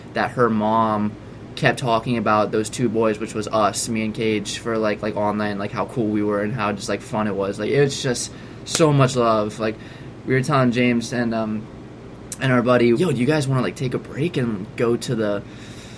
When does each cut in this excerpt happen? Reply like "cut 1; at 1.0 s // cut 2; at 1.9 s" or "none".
cut 1; at 12.9 s